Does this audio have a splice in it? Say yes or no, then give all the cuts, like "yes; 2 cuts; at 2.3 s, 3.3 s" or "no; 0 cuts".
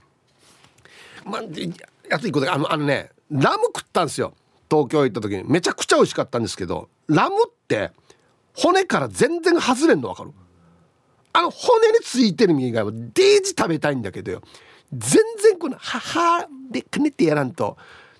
yes; 1 cut; at 1.2 s